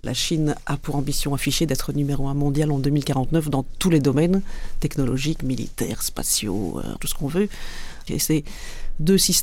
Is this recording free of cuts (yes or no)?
no